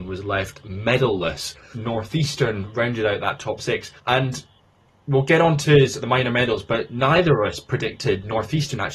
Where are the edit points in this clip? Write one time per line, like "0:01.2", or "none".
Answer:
0:01.7
0:04.0